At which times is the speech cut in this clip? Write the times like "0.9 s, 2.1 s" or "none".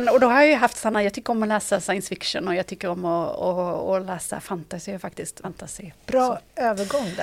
5.4 s